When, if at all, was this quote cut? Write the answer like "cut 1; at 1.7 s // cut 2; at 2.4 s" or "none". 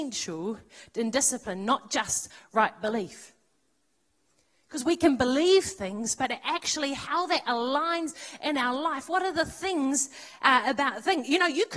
none

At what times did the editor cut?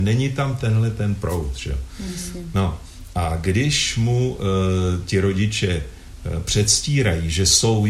none

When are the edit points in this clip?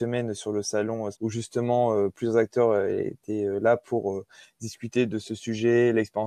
cut 1; at 1.1 s

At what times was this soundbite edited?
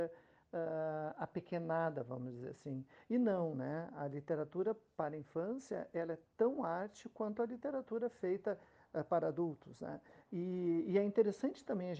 none

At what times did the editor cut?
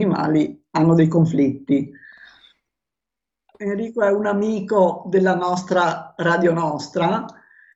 cut 1; at 3.5 s

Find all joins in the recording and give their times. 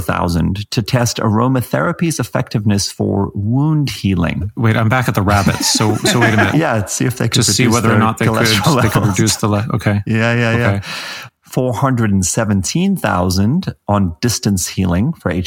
cut 1; at 6.5 s // cut 2; at 11.3 s

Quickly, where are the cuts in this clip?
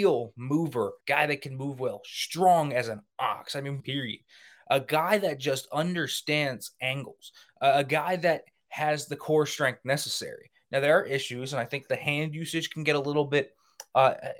cut 1; at 1.0 s // cut 2; at 3.8 s

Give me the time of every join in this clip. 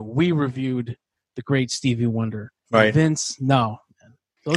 cut 1; at 2.6 s

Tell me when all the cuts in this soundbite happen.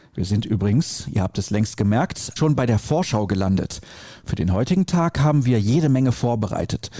cut 1; at 2.4 s

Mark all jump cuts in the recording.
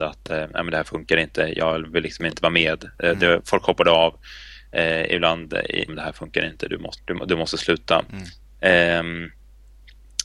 cut 1; at 5.9 s // cut 2; at 7.0 s

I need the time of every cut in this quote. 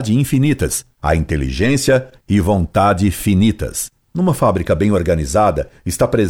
cut 1; at 1.0 s // cut 2; at 4.0 s

